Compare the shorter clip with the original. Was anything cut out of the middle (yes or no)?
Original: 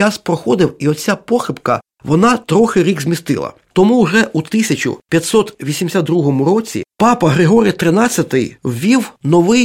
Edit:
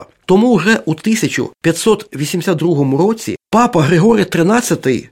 no